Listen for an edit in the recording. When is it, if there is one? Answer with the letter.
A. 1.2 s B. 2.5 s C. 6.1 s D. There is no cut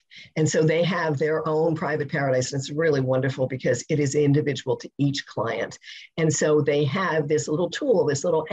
D